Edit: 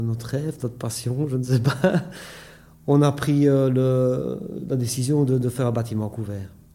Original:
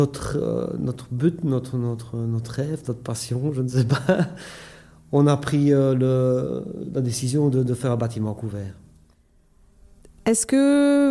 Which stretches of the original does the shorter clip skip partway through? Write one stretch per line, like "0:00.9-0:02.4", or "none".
none